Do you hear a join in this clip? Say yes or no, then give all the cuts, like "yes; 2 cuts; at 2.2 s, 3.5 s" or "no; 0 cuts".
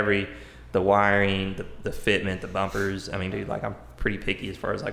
yes; 1 cut; at 3.3 s